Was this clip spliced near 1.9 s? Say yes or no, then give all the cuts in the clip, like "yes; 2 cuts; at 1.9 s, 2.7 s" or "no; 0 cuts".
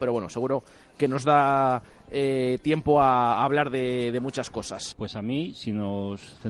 no; 1 cut; at 4.9 s